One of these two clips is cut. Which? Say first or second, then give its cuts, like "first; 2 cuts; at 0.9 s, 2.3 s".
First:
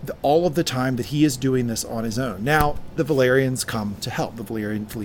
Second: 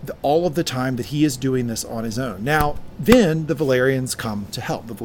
first; 1 cut; at 3.0 s